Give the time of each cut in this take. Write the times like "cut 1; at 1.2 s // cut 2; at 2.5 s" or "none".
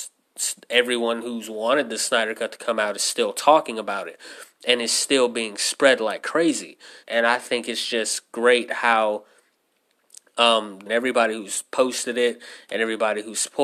cut 1; at 7.0 s // cut 2; at 10.9 s